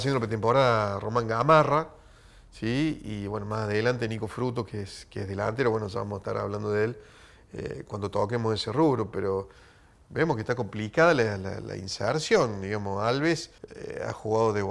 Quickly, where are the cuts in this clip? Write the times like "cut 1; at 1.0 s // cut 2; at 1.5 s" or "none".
cut 1; at 13.6 s

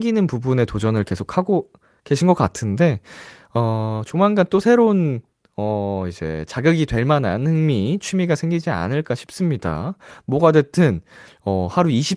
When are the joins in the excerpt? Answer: none

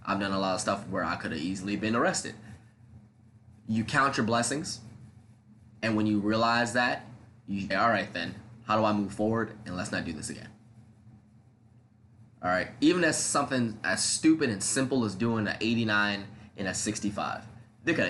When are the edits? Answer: cut 1; at 7.7 s

